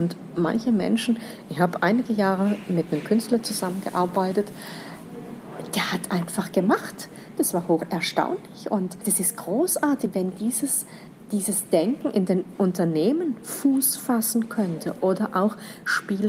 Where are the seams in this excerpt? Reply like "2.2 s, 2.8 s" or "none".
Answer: 7.4 s